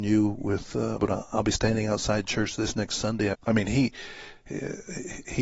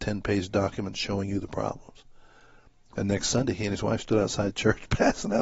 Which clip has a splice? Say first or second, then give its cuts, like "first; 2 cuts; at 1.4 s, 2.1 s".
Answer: first; 2 cuts; at 1.0 s, 3.3 s